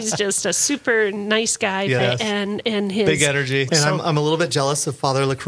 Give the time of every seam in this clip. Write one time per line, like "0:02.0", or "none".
0:02.0
0:03.7